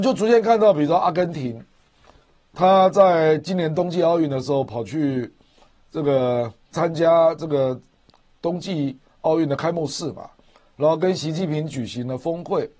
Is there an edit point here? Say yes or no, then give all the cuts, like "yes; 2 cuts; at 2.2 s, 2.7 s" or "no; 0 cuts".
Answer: yes; 1 cut; at 6.7 s